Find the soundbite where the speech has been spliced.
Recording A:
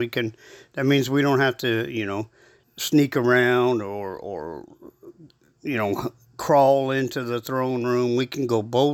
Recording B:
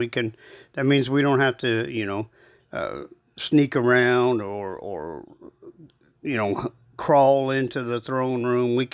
A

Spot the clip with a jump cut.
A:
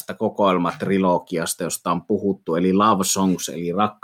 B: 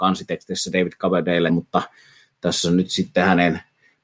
B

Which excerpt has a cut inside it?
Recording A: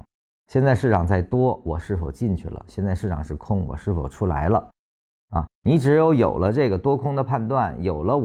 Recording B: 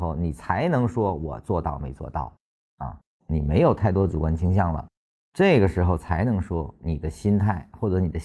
B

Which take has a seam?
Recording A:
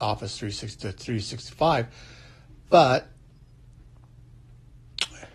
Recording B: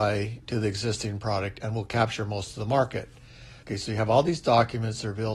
B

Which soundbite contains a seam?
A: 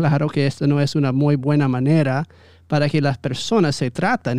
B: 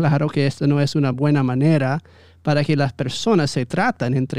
B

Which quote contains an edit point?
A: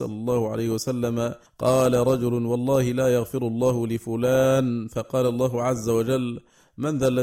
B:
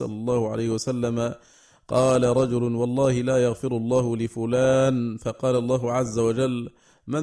A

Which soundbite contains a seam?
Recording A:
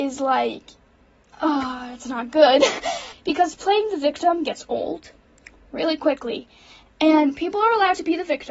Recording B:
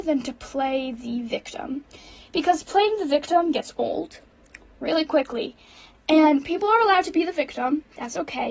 A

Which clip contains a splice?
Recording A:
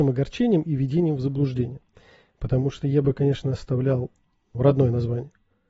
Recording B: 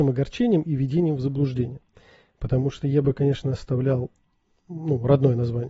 A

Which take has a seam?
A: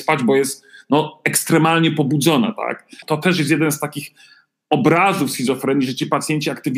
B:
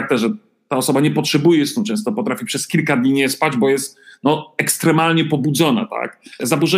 A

